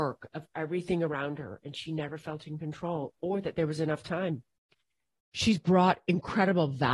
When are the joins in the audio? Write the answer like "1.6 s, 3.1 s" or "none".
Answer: 5.2 s